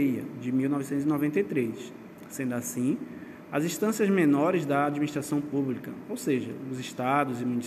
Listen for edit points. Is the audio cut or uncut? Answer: uncut